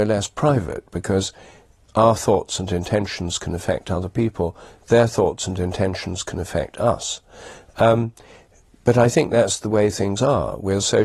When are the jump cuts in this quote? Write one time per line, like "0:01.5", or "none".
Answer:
none